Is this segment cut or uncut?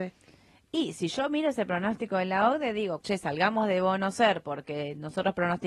cut